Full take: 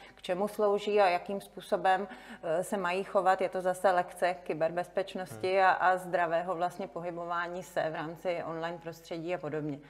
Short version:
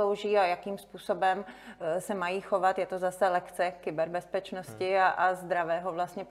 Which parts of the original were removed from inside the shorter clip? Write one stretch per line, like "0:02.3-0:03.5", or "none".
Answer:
none